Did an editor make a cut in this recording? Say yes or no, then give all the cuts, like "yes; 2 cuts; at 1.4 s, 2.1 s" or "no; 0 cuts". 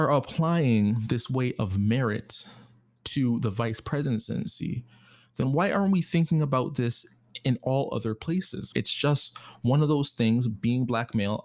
yes; 1 cut; at 8.7 s